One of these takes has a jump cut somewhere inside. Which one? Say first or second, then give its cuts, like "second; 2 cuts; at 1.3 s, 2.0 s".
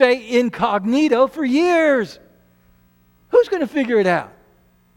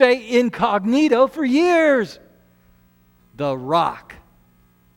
second; 1 cut; at 3.2 s